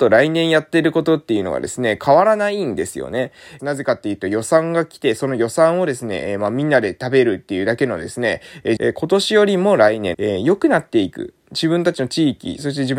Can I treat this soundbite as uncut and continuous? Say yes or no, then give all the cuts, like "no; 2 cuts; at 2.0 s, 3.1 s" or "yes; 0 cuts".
no; 3 cuts; at 3.6 s, 8.8 s, 10.1 s